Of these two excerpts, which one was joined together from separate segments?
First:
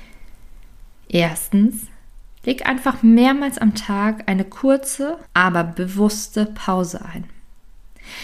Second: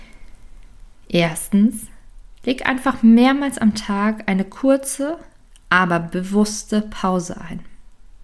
first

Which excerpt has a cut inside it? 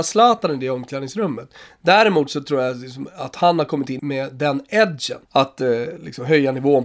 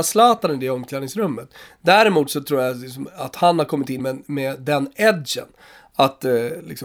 first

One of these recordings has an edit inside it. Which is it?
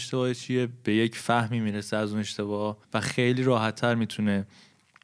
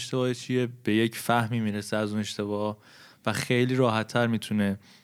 first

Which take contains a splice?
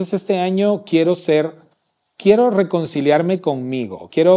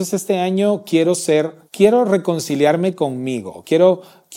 second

